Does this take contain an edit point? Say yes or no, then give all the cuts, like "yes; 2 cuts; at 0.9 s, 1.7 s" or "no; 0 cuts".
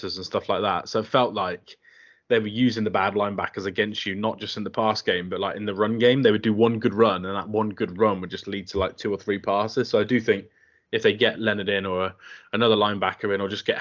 no; 0 cuts